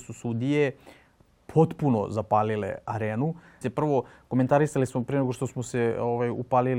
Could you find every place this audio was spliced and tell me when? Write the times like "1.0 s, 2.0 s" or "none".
3.6 s